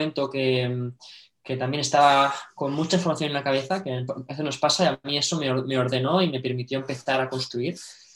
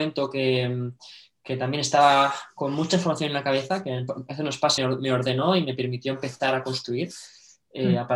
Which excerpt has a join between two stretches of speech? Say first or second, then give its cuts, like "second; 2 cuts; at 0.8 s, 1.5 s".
second; 1 cut; at 4.8 s